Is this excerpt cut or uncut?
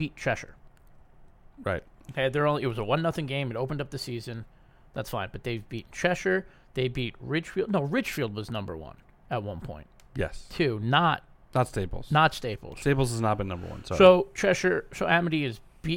uncut